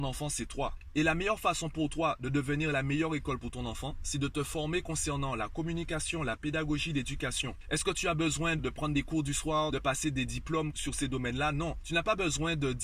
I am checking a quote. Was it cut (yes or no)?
yes